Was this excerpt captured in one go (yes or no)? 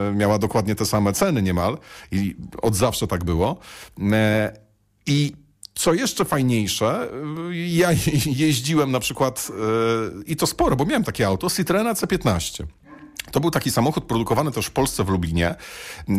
yes